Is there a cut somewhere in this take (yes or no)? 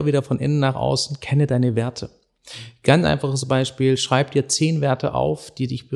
no